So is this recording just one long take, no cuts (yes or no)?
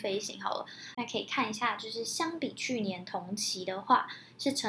no